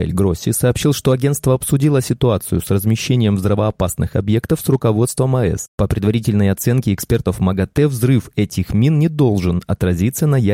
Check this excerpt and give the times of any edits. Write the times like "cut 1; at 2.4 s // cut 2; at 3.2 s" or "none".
cut 1; at 5.7 s